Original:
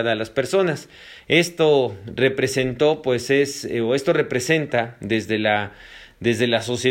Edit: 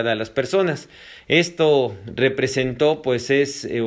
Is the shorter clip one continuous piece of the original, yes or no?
yes